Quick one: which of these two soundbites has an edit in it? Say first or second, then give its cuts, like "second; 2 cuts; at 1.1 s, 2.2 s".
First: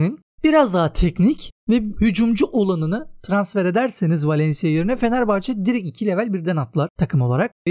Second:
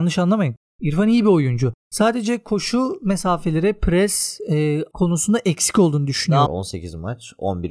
second; 1 cut; at 6.5 s